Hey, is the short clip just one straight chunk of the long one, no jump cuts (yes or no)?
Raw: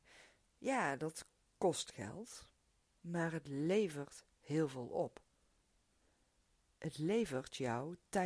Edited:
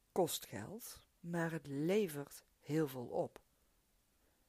no